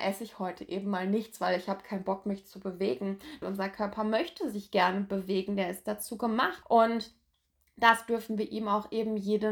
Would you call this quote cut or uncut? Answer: cut